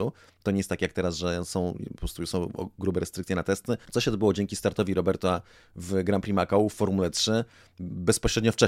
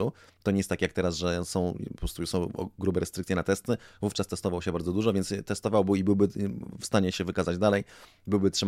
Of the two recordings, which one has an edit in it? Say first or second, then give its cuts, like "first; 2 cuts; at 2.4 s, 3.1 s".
first; 1 cut; at 3.8 s